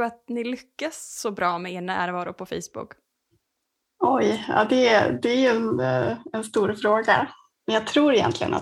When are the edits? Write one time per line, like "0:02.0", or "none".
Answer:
none